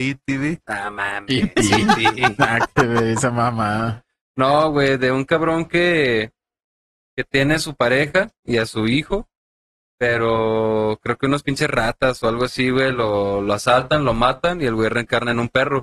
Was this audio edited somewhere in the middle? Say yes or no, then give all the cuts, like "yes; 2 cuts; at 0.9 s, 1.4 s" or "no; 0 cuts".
no; 0 cuts